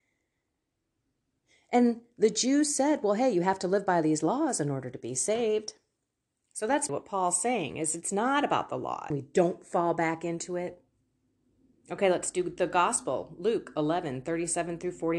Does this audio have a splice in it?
yes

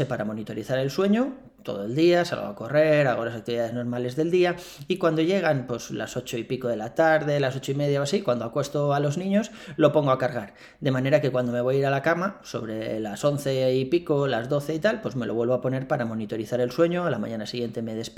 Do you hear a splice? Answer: no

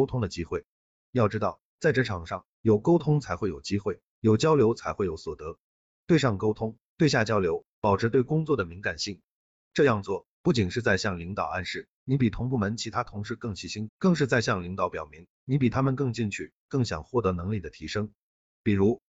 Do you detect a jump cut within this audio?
yes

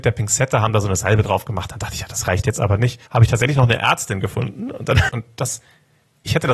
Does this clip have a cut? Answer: yes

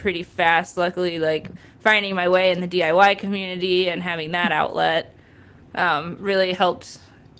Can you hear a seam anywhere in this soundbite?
no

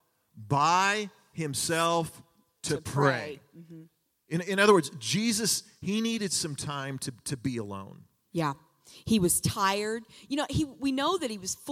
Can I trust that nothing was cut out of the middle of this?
yes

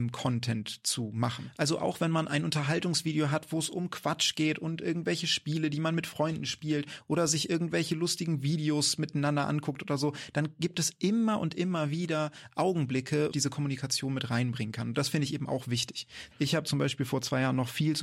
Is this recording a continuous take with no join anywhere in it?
no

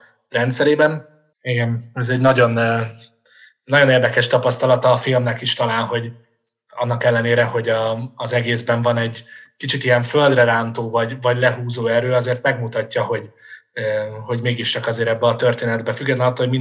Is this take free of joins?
no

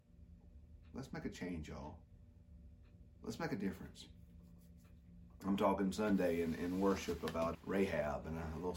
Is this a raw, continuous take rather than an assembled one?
no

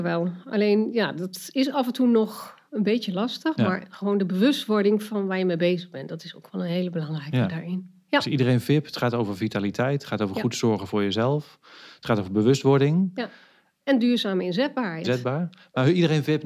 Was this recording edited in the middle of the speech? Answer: yes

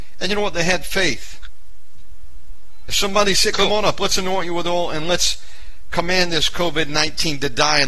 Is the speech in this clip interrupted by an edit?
yes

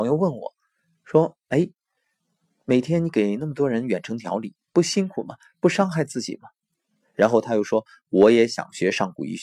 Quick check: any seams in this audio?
yes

